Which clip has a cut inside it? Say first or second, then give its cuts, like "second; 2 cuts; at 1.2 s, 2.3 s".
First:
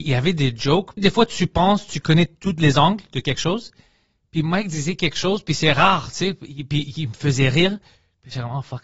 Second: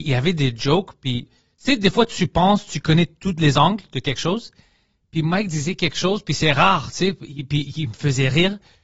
first; 1 cut; at 1.0 s